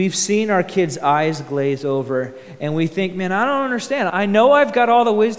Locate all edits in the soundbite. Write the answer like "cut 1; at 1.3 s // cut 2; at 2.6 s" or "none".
cut 1; at 4.1 s